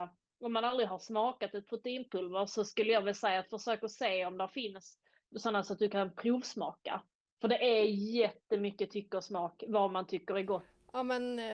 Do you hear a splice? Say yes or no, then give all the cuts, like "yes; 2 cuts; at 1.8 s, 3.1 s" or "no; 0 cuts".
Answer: yes; 1 cut; at 5.3 s